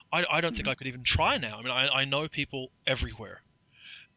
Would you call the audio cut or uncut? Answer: uncut